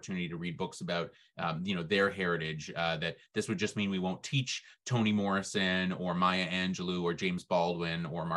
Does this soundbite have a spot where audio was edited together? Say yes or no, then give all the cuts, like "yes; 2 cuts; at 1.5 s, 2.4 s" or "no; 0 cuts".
no; 0 cuts